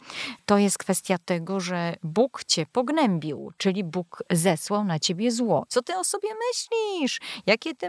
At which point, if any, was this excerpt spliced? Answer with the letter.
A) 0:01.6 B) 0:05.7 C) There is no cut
B